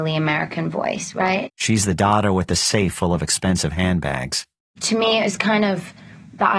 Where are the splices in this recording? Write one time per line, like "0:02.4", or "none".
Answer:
0:01.5
0:04.6